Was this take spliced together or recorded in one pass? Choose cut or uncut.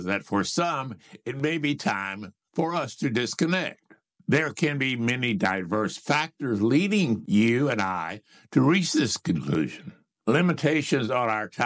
uncut